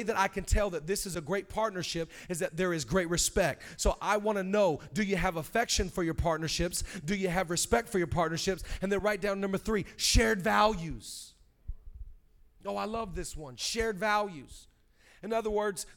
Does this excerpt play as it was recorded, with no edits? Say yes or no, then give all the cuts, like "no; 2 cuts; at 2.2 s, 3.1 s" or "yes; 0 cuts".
yes; 0 cuts